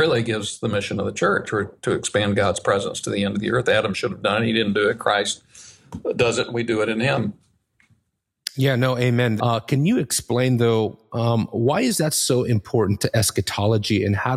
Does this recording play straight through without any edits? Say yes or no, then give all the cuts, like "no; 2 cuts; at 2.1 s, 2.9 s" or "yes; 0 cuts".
no; 1 cut; at 9.4 s